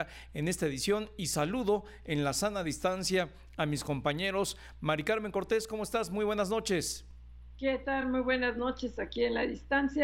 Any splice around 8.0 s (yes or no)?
no